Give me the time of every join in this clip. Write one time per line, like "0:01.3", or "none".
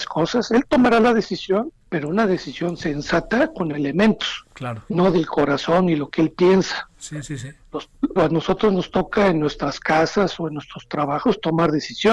0:01.8
0:08.2